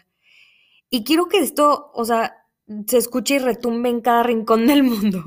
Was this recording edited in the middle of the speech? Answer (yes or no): no